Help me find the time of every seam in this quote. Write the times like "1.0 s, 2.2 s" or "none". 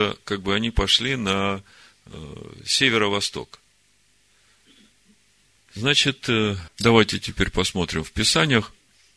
5.5 s, 6.7 s